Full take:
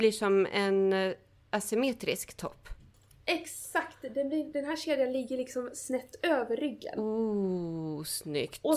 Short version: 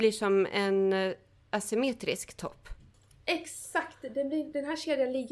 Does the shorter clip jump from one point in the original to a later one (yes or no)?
no